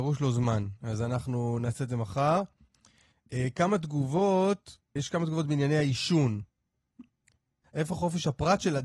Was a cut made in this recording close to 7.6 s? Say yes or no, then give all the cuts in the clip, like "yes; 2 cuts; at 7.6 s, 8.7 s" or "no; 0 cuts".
yes; 2 cuts; at 5.0 s, 7.6 s